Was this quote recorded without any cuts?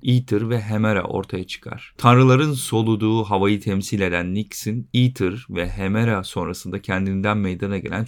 no; 1 cut; at 2.0 s

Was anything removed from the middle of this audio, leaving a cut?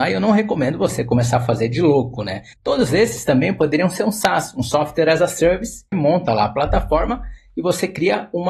yes; 2 cuts; at 2.5 s, 5.9 s

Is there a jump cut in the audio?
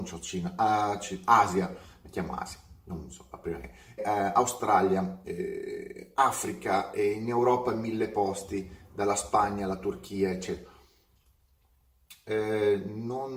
yes; 1 cut; at 4.0 s

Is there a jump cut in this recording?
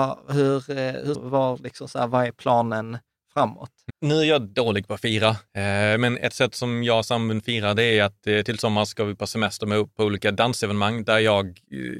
yes; 2 cuts; at 1.1 s, 3.9 s

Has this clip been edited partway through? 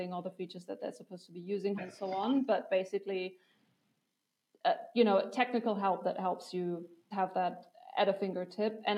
yes; 2 cuts; at 1.8 s, 7.1 s

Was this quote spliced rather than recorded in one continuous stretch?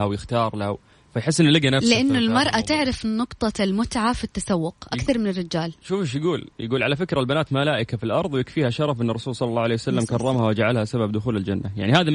no; 0 cuts

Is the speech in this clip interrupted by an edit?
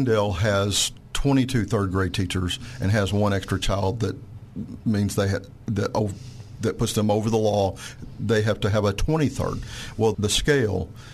yes; 1 cut; at 10.1 s

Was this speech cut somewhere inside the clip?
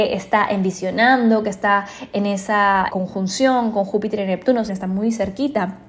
yes; 2 cuts; at 2.9 s, 4.7 s

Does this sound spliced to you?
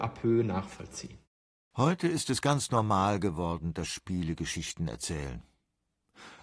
no; 0 cuts

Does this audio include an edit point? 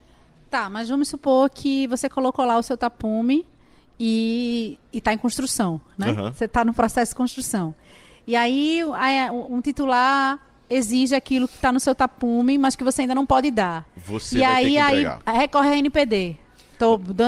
no; 0 cuts

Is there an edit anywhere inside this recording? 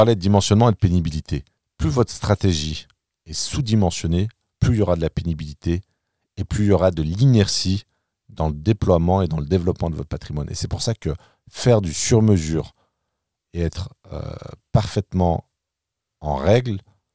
no; 0 cuts

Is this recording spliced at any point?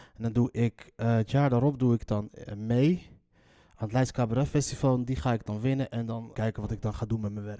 yes; 1 cut; at 6.3 s

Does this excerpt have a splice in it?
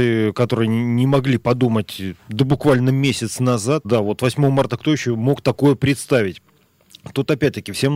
yes; 2 cuts; at 2.2 s, 3.8 s

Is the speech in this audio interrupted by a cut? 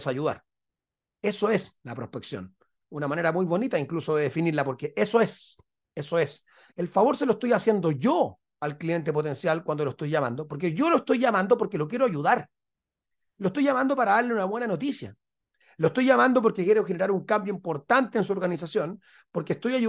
yes; 1 cut; at 6.7 s

